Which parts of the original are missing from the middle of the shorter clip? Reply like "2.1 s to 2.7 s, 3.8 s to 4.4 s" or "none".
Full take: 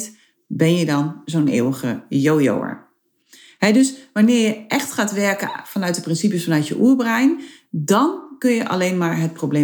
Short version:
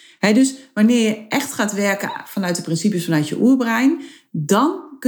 none

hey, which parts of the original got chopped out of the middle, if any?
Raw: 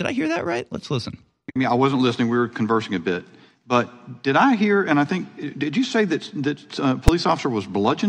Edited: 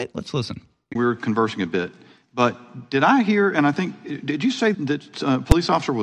1.5 s to 2.3 s, 6.1 s to 6.3 s

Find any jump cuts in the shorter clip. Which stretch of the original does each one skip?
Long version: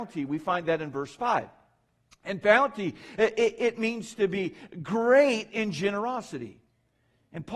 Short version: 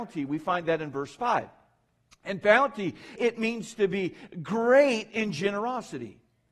3.2 s to 3.6 s

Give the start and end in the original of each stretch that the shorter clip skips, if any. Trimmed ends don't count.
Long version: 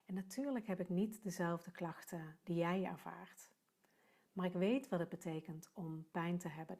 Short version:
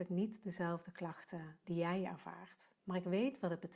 3.6 s to 4.3 s

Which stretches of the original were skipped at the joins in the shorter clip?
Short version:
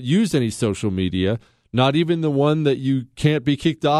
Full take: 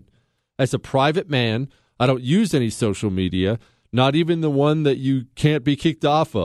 none

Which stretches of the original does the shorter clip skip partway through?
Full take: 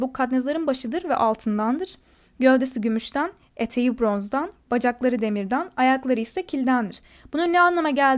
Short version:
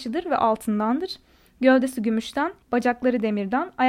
3.4 s to 4.6 s

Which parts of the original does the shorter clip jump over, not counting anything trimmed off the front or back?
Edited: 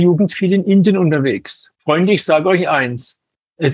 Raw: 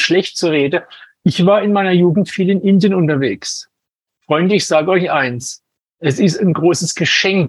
3.7 s to 4.2 s

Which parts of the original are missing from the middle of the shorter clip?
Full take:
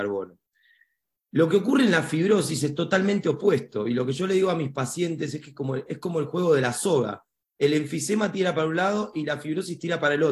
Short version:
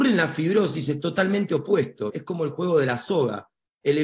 3.8 s to 5.8 s

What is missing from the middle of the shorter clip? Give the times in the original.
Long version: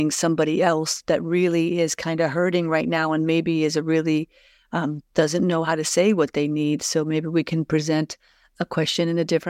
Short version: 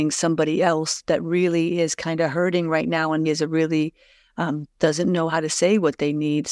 3.3 s to 3.6 s

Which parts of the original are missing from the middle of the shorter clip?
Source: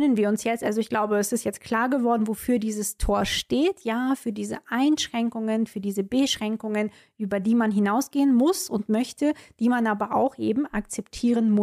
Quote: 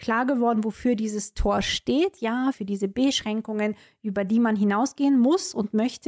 4.2 s to 5.7 s

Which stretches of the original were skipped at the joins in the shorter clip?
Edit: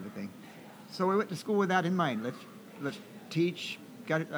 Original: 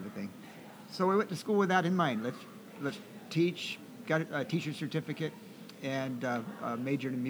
none

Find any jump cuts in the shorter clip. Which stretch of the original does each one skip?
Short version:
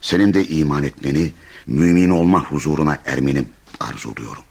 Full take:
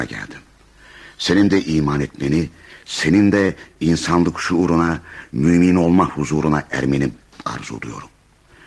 2.8 s to 5.3 s

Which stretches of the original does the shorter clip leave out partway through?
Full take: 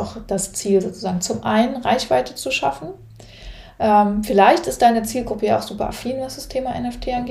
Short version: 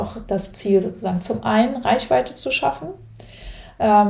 none

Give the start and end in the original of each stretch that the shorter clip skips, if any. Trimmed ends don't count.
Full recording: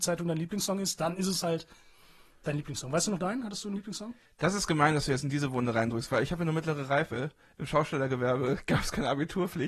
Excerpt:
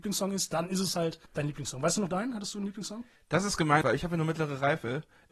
1.7 s to 2.4 s, 4.9 s to 6.1 s

